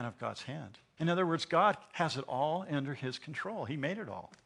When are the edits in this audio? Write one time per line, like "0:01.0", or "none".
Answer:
0:01.0